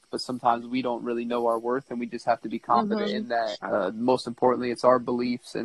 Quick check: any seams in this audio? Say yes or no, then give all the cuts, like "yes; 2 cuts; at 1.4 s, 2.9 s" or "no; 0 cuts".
yes; 1 cut; at 3.6 s